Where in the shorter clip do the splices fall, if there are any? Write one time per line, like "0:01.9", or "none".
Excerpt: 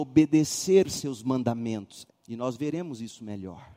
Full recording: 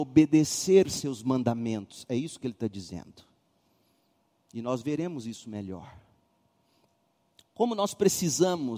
0:02.1